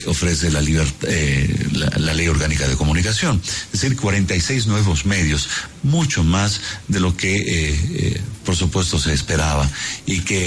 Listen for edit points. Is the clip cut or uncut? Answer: uncut